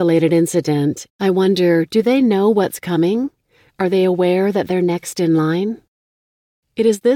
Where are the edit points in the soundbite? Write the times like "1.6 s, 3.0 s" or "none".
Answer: 1.1 s